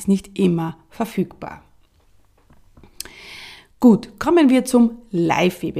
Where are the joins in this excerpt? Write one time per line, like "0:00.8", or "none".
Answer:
none